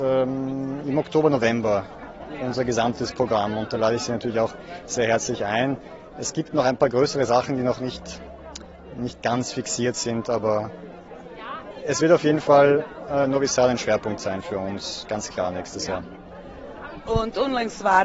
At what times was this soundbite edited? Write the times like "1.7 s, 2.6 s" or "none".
none